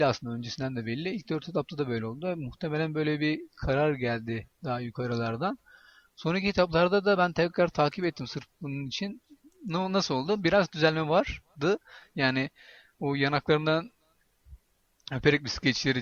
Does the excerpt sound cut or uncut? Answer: uncut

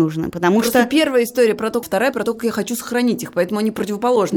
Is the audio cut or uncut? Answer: cut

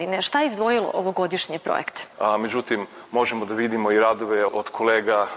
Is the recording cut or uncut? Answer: cut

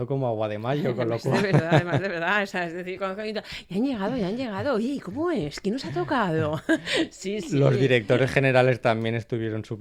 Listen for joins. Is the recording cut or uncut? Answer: uncut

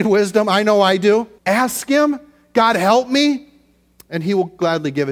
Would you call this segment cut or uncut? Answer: cut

